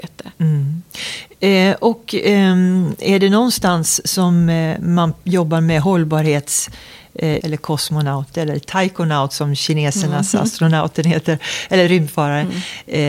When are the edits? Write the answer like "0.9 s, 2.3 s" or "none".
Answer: 7.4 s